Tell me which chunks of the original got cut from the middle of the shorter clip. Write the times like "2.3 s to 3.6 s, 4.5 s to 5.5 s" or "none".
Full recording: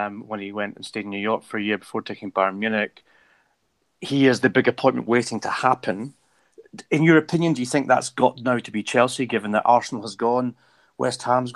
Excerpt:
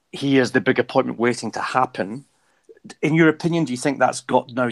none